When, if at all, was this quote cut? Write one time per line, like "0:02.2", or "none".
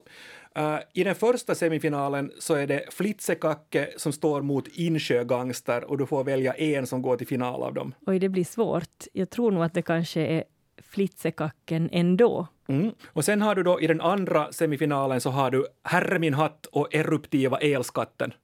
0:08.0
0:13.0